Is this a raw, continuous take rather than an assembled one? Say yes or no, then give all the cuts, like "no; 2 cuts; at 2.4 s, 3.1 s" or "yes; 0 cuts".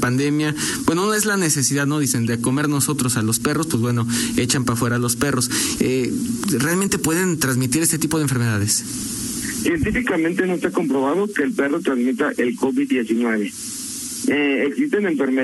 no; 1 cut; at 5.8 s